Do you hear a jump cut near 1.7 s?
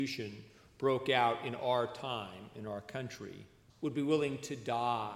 no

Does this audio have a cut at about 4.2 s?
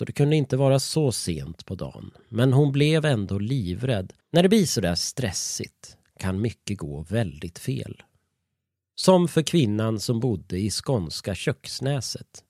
yes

